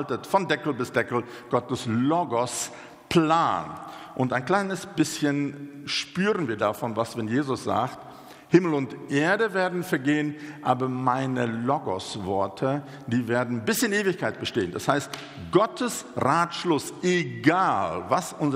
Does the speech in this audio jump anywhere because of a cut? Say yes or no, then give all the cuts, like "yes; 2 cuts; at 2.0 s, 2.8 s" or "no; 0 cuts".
no; 0 cuts